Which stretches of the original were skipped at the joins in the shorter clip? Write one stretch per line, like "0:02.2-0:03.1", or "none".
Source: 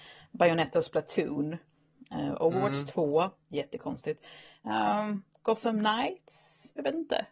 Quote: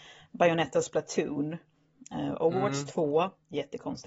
none